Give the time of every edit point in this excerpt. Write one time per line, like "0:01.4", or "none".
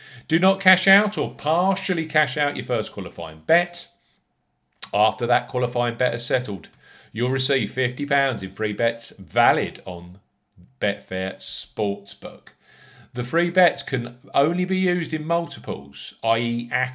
none

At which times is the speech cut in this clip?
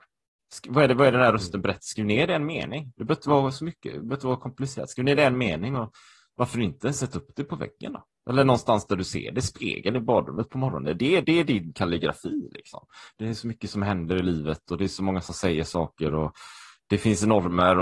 0:11.2
0:13.1

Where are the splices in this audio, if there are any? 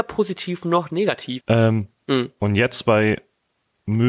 0:01.4

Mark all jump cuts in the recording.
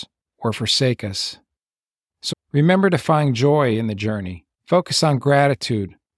0:02.3
0:04.5

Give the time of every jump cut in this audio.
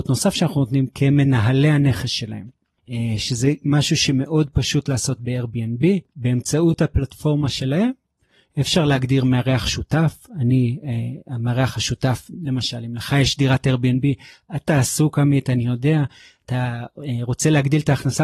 none

